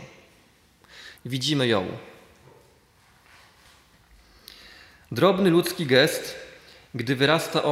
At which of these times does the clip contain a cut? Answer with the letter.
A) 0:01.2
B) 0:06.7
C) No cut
A